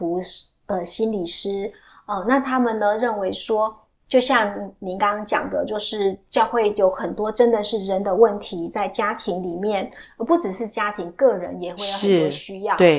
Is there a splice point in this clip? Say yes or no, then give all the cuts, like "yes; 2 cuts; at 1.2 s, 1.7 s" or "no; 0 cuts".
no; 0 cuts